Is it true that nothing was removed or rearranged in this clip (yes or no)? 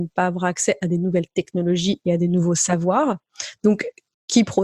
no